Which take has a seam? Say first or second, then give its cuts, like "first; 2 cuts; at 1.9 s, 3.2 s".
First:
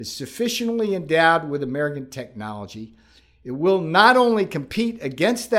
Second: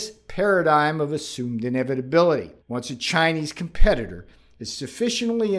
second; 1 cut; at 2.6 s